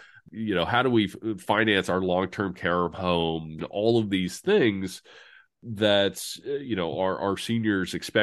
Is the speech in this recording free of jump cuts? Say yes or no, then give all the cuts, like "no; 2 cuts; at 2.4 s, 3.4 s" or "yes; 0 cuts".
no; 1 cut; at 3.6 s